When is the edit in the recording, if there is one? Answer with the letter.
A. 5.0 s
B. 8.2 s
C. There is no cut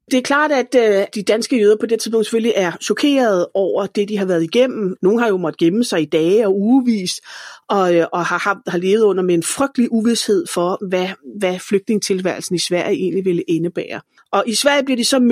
A